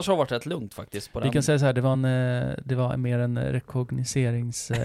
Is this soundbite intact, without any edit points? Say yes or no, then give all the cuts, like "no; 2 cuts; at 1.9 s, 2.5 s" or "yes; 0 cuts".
yes; 0 cuts